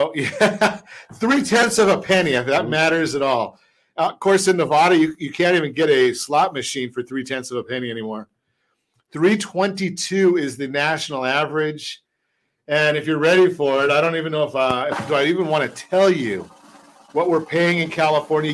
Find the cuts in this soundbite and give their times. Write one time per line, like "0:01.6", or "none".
none

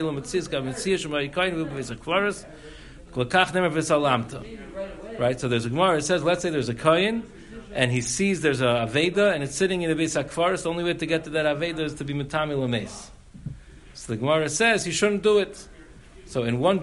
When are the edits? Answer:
none

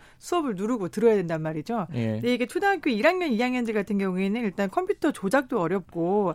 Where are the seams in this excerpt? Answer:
none

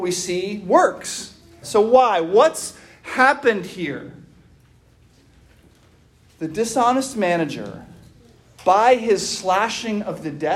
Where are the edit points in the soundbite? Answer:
0:01.6

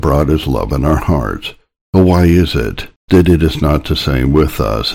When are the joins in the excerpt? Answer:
0:03.0

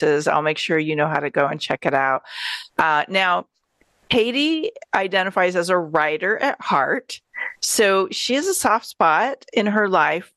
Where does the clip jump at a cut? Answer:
none

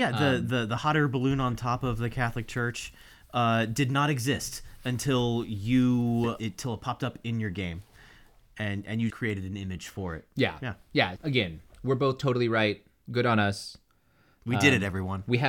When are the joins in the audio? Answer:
0:09.1
0:11.2

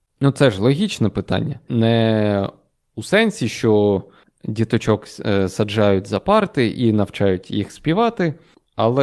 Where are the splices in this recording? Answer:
0:01.7

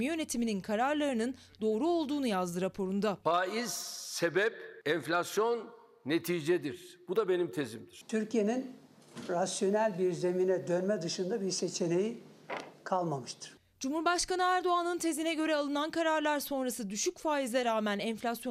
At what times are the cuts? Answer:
none

